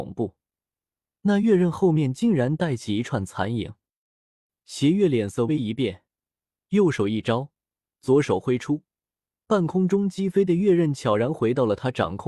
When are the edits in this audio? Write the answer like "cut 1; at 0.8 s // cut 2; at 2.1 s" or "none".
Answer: cut 1; at 5.5 s